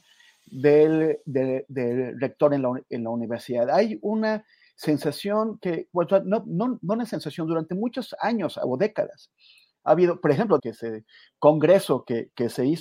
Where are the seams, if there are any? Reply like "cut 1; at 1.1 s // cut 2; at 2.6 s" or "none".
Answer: cut 1; at 10.6 s